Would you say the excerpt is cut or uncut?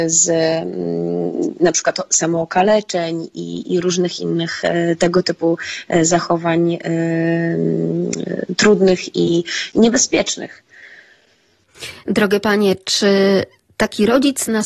uncut